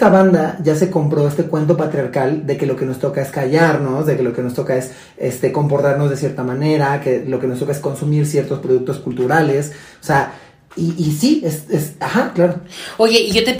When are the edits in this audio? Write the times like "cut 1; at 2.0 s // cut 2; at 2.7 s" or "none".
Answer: cut 1; at 12.0 s